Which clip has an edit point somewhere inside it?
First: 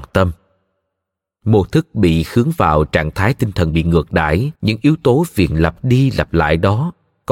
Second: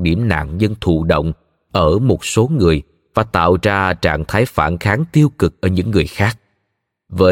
first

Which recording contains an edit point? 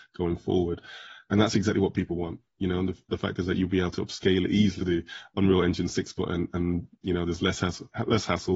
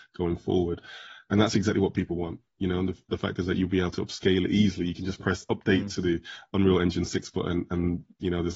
first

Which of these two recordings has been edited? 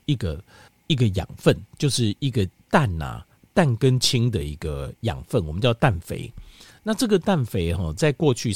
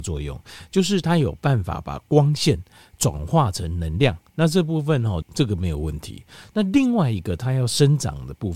second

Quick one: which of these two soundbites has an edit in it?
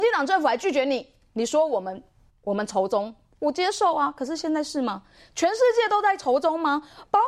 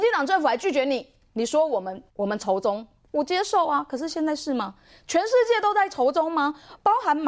second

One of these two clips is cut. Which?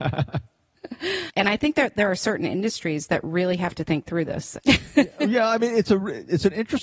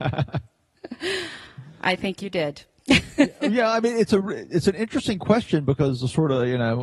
first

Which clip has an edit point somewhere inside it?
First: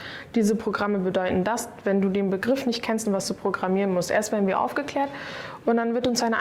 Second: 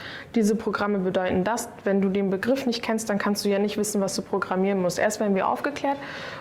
first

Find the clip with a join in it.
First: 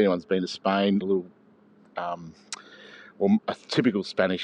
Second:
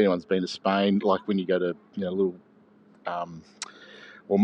first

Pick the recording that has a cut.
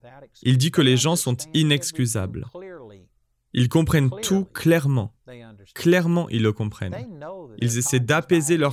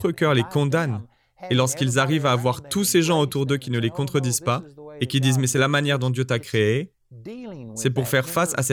first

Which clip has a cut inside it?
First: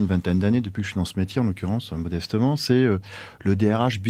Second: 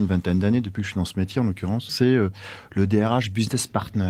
second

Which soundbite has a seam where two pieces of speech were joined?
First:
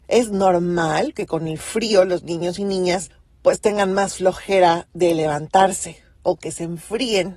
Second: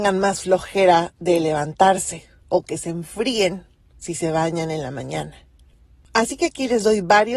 first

